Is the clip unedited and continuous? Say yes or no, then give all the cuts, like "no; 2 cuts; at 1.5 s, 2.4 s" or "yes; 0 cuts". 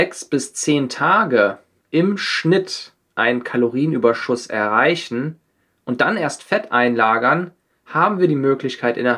yes; 0 cuts